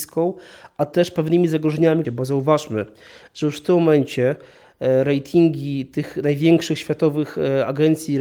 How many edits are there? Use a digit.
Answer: 1